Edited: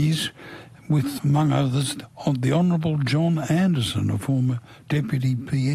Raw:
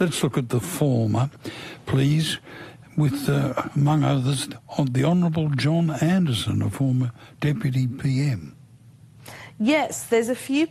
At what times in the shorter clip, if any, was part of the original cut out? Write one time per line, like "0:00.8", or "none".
0:01.2